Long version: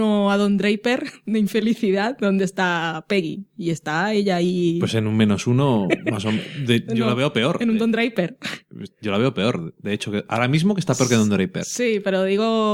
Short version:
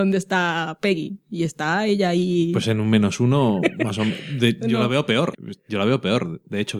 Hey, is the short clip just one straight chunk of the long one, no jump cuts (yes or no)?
no